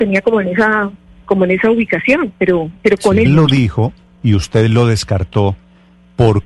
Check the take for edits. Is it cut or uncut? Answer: cut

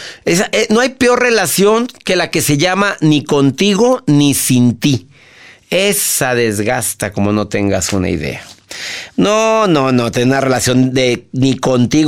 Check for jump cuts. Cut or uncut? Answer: uncut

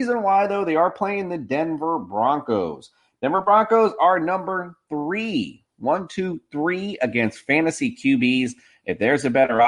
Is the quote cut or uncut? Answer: uncut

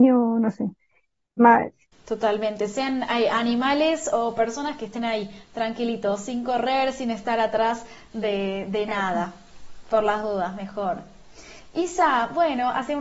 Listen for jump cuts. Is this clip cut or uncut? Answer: cut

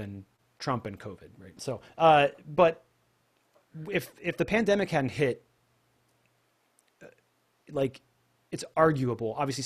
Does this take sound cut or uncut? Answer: cut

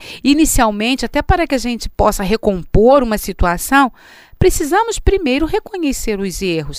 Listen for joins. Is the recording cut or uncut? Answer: uncut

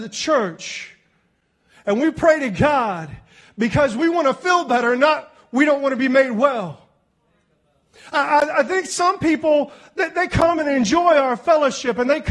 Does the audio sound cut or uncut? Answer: uncut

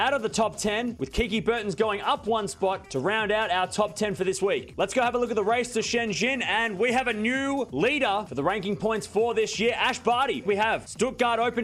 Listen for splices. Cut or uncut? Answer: cut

